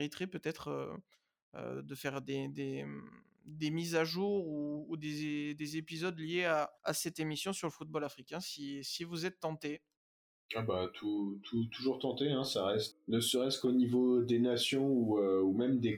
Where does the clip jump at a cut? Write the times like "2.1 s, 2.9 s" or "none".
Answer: 6.8 s, 12.9 s

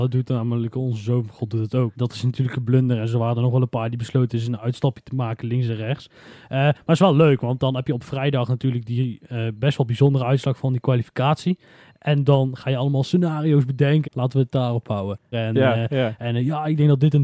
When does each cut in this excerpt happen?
1.9 s, 14.0 s, 15.3 s

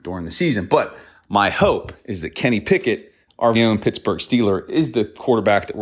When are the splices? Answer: 3.5 s

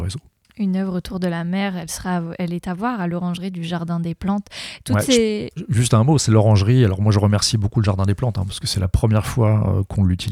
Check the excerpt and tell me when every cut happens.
none

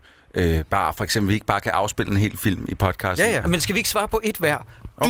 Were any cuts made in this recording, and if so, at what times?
3.4 s

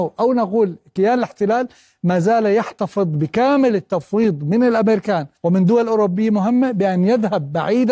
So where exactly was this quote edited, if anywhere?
5.4 s

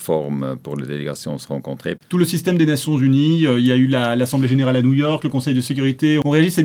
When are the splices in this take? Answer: 2.0 s

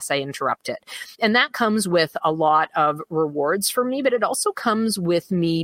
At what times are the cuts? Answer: 1.1 s

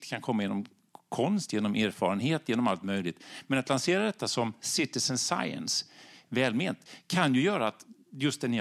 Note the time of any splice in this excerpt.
none

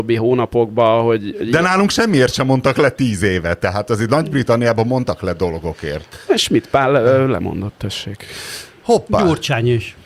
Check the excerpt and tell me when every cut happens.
none

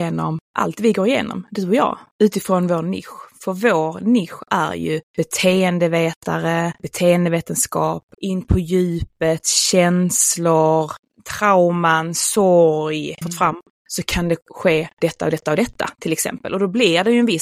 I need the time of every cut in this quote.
8.1 s, 13.2 s

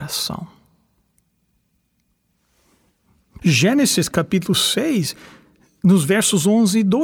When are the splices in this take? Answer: 3.4 s

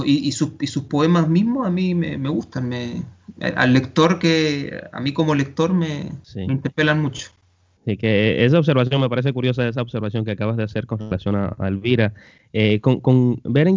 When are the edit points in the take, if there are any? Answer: 6.2 s

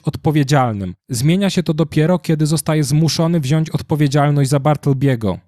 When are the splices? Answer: 1.0 s

